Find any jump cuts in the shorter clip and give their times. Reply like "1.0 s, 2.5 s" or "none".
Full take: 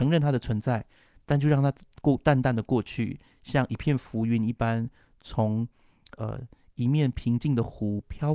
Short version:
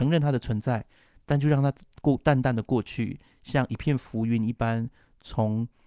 none

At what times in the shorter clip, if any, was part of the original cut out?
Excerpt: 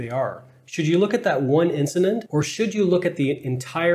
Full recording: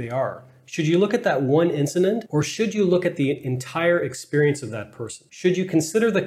none

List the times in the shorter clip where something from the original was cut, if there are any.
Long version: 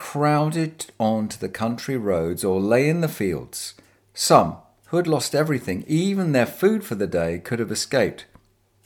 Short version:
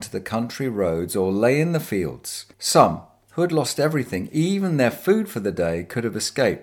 2.5 s

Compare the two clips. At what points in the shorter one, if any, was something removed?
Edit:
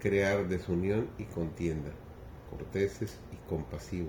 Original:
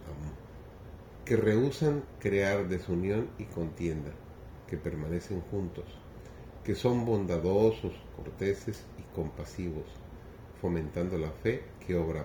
2.5 s

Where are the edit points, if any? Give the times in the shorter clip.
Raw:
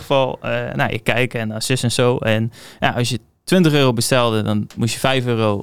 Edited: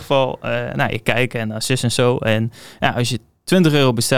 none

